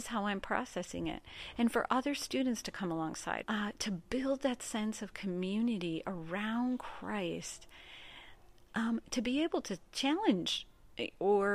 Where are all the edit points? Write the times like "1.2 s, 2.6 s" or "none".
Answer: 3.4 s